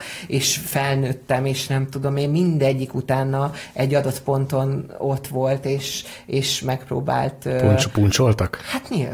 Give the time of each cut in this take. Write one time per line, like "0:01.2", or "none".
none